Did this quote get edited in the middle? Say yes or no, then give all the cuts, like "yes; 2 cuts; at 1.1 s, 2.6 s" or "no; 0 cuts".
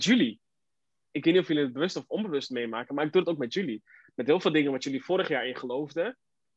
no; 0 cuts